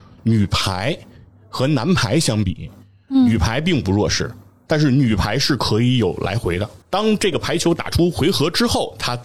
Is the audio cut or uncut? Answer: cut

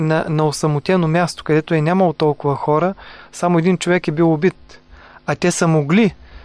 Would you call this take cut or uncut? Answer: uncut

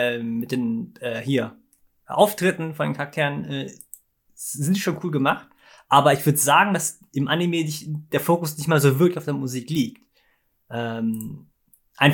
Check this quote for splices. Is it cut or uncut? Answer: uncut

